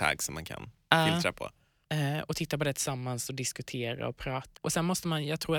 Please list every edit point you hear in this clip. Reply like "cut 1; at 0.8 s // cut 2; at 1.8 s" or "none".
cut 1; at 1.8 s // cut 2; at 4.6 s